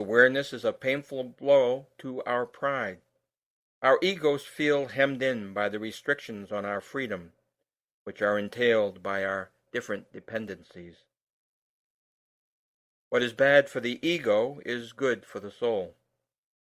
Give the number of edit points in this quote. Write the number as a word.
one